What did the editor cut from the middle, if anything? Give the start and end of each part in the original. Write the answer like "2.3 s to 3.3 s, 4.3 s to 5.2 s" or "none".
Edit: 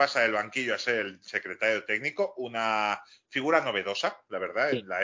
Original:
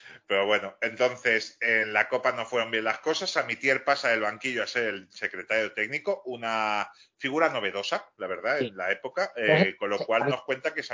none